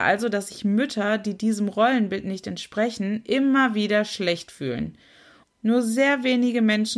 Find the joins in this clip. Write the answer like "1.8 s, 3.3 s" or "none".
5.4 s